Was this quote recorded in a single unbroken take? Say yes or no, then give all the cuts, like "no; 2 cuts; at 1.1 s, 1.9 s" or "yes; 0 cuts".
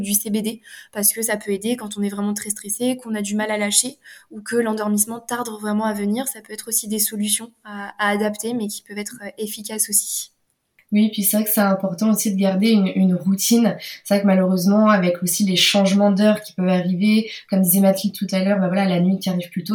yes; 0 cuts